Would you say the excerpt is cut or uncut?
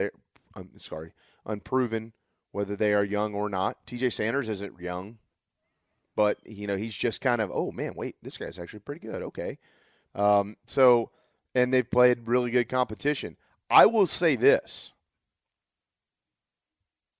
cut